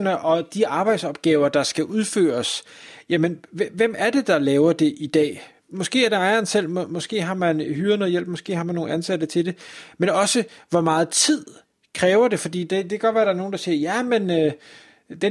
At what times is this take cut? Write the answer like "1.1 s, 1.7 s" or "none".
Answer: none